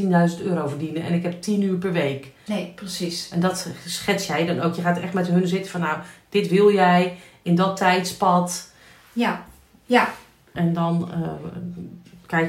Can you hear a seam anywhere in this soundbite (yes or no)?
yes